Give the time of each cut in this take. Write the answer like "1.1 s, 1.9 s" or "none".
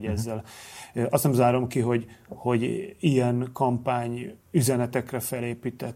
4.4 s